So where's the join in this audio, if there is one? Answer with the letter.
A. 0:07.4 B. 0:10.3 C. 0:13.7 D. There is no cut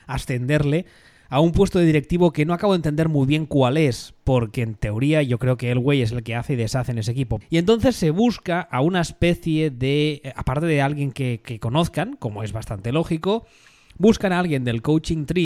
A